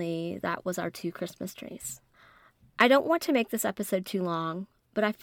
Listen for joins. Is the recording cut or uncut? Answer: uncut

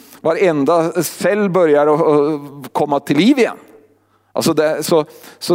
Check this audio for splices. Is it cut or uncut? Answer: uncut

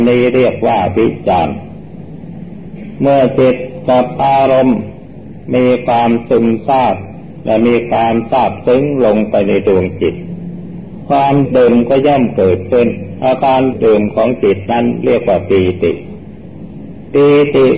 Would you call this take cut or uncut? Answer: cut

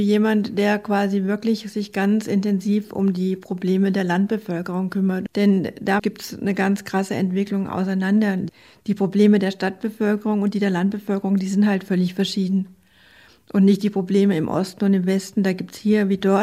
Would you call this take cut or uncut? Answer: uncut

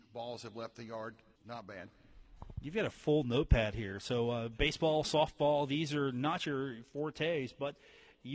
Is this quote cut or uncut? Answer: cut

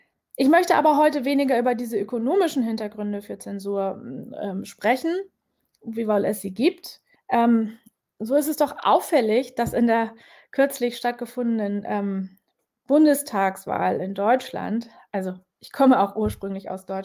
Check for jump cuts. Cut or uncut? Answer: cut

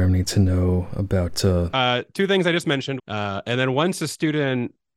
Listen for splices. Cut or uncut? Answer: cut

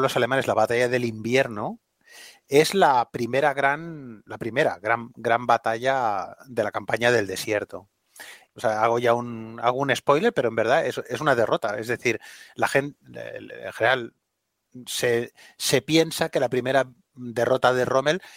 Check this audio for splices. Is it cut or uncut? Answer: cut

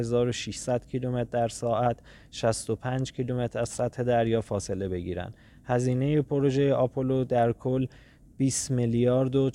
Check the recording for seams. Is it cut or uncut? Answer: uncut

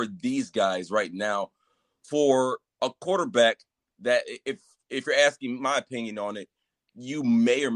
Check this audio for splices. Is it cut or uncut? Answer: uncut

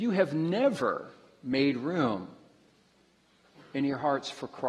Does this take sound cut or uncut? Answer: uncut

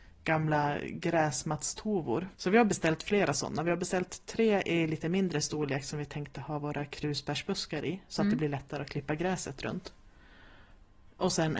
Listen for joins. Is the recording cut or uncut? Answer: cut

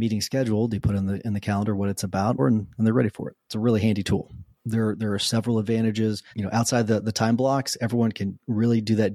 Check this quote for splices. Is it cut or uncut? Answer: cut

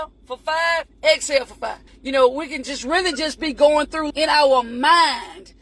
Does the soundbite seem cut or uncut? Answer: cut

